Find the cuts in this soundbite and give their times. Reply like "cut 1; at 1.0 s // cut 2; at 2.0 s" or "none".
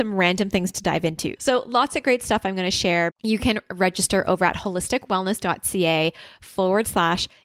cut 1; at 1.4 s // cut 2; at 3.1 s